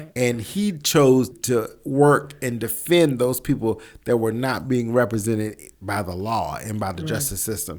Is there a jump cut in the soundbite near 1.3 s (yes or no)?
yes